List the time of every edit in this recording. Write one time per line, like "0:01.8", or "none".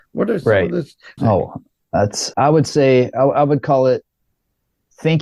0:01.2
0:02.3